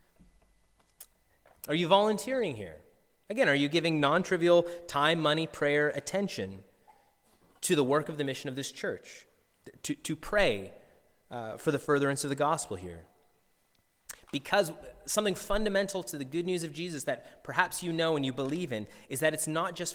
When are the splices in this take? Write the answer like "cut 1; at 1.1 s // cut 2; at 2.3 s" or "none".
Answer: cut 1; at 1.5 s